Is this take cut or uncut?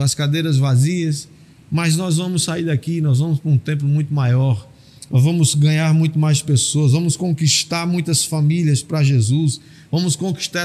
uncut